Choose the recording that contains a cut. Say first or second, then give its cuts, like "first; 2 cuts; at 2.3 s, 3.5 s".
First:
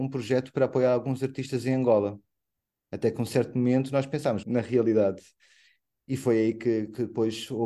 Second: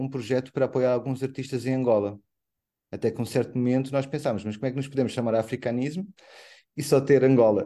first; 1 cut; at 4.4 s